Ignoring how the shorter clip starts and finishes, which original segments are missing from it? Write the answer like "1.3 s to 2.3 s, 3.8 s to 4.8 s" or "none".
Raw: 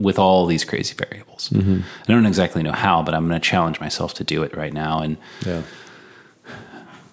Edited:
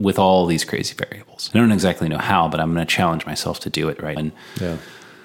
1.5 s to 2.0 s, 4.7 s to 5.0 s